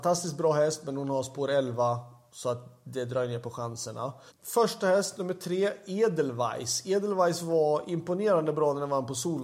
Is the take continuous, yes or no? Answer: no